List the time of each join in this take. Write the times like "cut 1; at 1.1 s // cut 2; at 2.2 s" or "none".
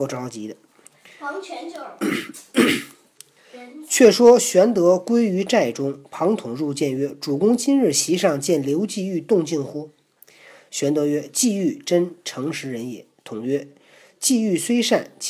none